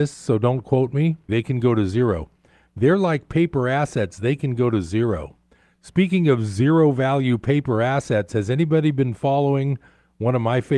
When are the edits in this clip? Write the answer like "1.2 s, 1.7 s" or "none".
1.3 s

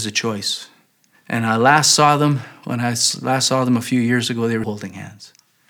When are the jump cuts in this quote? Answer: 1.1 s, 4.6 s

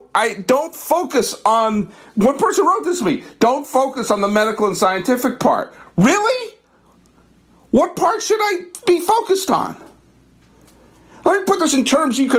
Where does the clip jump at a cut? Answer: none

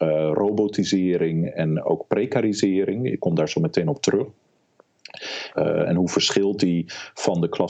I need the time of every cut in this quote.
5.5 s

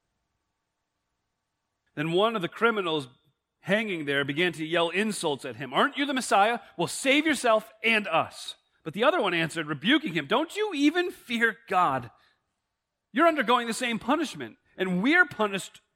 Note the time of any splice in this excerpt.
1.9 s

